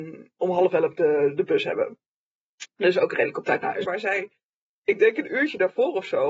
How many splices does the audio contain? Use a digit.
1